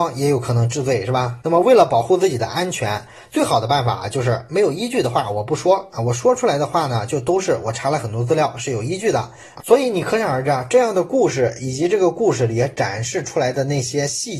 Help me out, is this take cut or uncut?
cut